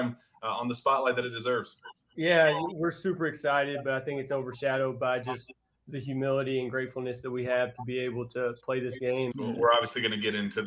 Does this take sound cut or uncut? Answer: cut